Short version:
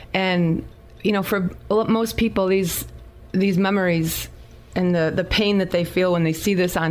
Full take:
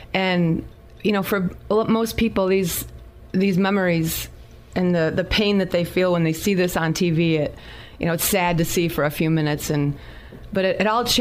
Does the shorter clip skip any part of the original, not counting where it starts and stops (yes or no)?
no